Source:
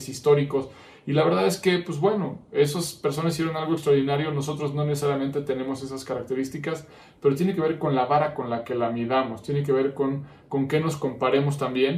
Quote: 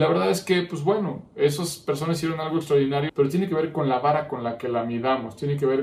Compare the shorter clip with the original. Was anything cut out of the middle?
yes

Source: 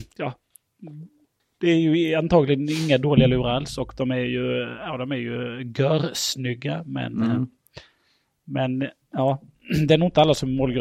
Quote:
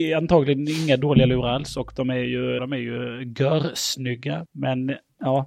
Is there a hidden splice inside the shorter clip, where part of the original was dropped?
yes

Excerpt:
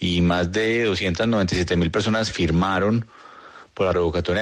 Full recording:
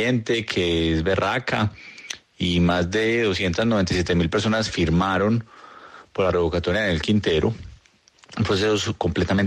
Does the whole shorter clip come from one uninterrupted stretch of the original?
yes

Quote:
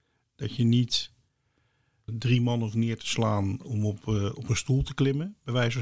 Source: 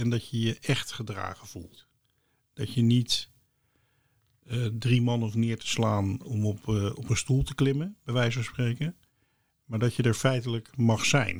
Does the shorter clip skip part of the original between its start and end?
yes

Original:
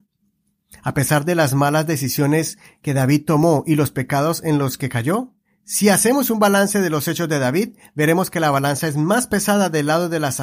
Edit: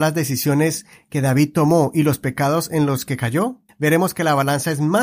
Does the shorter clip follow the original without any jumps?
no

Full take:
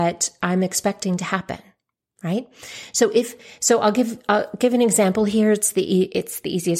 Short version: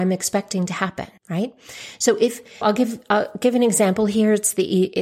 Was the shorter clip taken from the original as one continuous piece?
no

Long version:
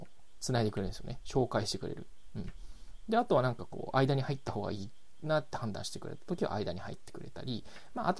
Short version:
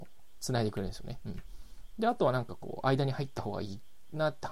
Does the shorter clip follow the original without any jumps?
no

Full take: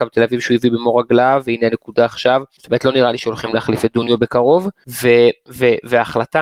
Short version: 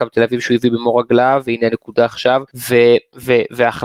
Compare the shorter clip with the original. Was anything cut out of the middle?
yes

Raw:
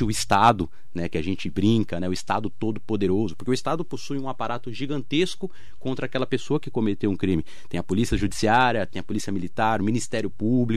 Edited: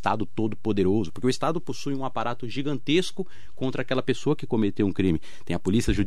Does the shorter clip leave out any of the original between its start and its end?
no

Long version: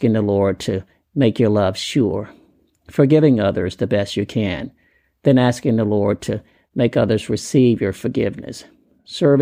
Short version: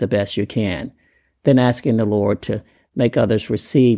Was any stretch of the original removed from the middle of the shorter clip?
no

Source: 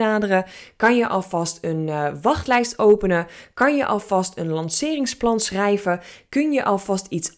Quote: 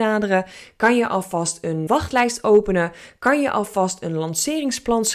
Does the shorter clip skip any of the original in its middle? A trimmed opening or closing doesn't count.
yes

